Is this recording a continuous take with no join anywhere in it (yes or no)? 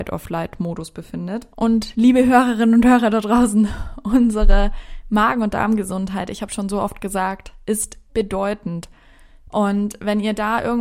no